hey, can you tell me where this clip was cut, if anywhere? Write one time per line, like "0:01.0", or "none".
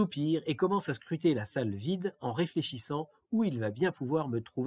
none